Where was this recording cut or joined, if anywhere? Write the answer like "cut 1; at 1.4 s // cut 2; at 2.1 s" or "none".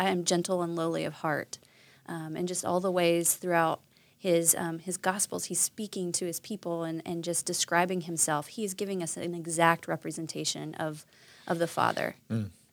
none